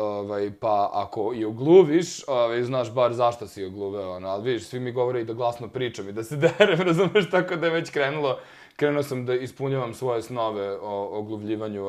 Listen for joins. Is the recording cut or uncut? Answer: uncut